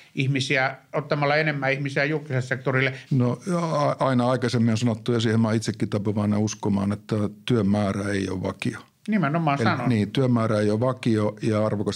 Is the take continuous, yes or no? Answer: no